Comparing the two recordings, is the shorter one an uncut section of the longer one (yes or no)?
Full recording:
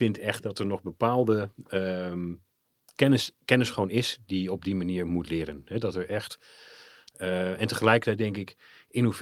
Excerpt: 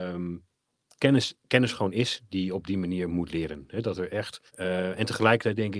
no